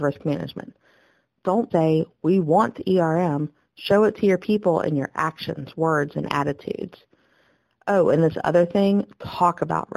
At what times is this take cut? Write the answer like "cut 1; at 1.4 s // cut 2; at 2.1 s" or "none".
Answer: cut 1; at 1.7 s